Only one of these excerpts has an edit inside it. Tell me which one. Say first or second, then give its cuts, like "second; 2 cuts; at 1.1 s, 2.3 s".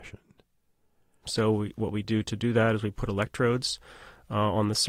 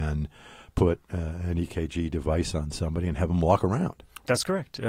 first; 1 cut; at 1.2 s